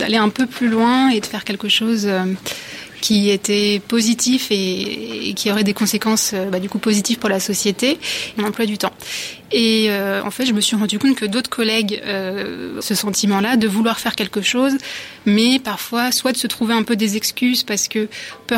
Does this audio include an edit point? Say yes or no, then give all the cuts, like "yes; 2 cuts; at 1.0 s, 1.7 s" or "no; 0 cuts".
yes; 2 cuts; at 8.4 s, 12.8 s